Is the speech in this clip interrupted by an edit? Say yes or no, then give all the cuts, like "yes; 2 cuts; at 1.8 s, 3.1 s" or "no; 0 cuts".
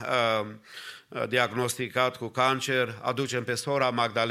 no; 0 cuts